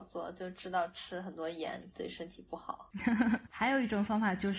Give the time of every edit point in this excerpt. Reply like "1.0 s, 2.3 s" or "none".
3.5 s

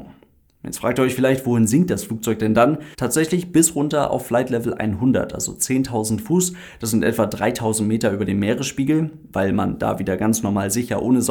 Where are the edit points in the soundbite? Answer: 2.9 s

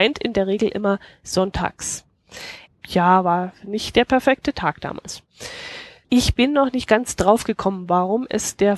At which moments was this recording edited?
2.7 s, 6.0 s

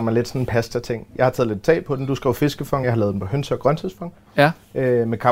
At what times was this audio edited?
none

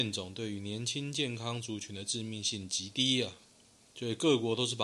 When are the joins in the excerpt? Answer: none

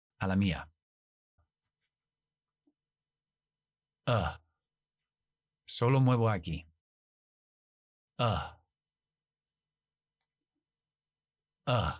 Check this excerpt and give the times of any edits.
1.4 s

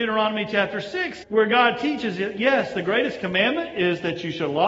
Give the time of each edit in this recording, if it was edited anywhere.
1.2 s

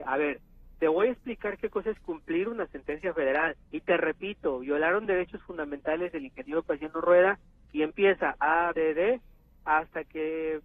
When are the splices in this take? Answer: 3.7 s, 8.7 s

